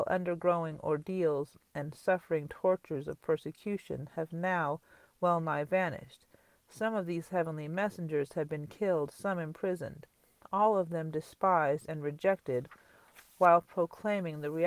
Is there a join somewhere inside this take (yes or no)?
no